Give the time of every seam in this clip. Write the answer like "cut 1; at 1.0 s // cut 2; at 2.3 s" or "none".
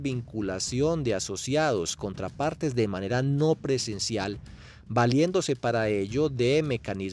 cut 1; at 2.0 s